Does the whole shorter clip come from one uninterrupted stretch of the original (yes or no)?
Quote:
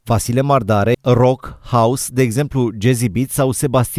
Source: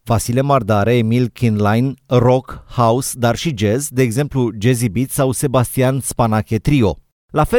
no